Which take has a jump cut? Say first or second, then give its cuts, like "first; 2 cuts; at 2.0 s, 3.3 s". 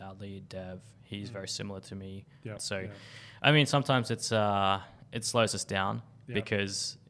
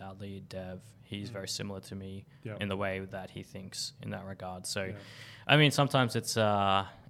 first; 1 cut; at 2.6 s